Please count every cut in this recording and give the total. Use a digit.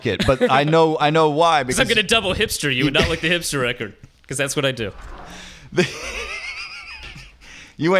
0